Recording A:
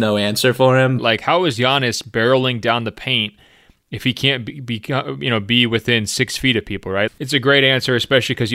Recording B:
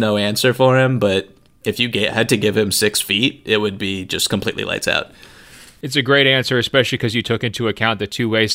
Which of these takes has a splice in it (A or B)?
A